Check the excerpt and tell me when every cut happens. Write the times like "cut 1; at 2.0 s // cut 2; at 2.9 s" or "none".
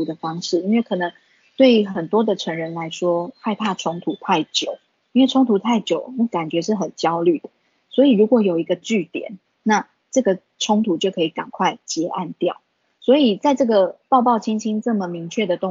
cut 1; at 9.4 s // cut 2; at 13.0 s